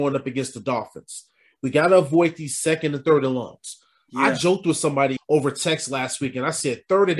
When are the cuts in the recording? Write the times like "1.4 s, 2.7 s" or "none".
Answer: 5.2 s